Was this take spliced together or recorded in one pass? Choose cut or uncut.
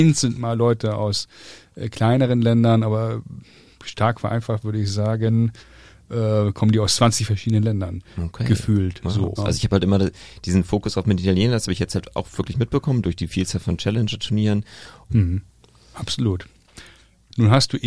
cut